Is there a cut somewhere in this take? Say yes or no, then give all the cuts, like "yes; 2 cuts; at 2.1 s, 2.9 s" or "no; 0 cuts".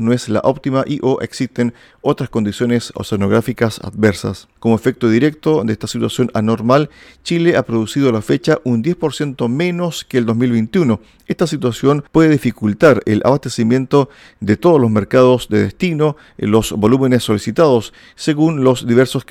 yes; 1 cut; at 4.6 s